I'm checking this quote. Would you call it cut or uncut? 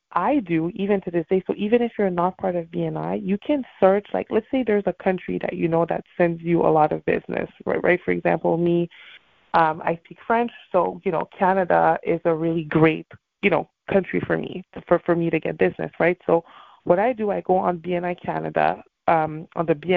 uncut